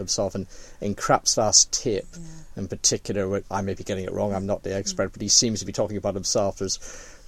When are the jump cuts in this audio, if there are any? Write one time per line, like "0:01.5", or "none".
0:03.4